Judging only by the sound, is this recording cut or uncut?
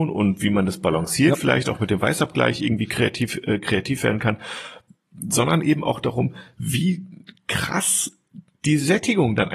uncut